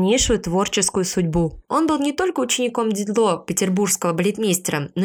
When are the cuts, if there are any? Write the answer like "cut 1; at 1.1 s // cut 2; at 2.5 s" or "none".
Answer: cut 1; at 1.7 s